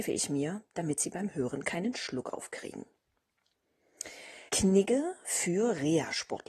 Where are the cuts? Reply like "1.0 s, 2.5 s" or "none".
4.5 s